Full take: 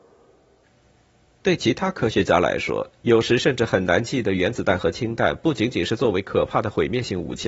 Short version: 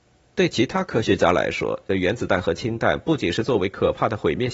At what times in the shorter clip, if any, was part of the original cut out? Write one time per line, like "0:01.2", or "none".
0:01.9
0:03.2